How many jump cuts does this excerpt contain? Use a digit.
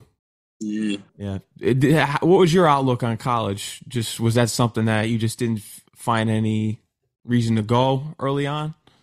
1